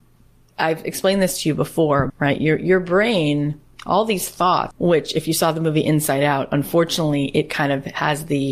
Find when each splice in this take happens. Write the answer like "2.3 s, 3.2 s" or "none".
2.1 s, 4.7 s